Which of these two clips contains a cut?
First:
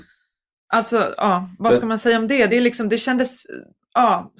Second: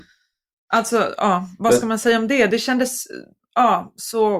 second; 1 cut; at 2.5 s

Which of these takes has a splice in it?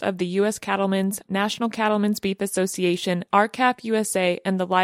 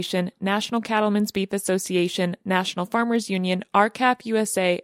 first; 2 cuts; at 1.2 s, 3.3 s

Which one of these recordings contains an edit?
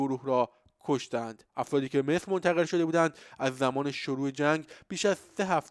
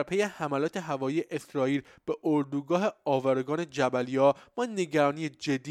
first; 1 cut; at 1.5 s

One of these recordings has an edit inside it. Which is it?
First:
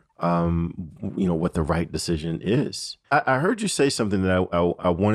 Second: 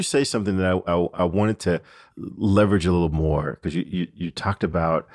first; 1 cut; at 3.0 s

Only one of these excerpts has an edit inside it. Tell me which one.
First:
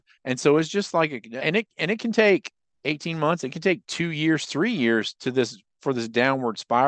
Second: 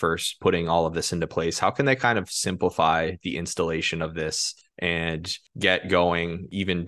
first; 1 cut; at 1.4 s

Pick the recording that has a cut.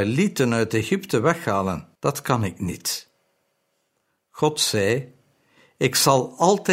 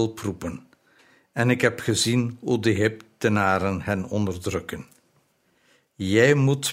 first; 1 cut; at 2.0 s

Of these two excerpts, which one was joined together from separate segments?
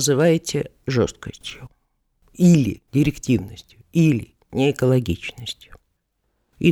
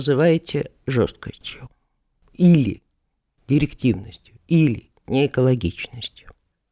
first; 1 cut; at 2.9 s

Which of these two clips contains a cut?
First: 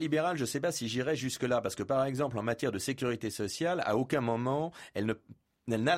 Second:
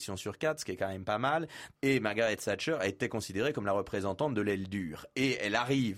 second; 1 cut; at 1.8 s

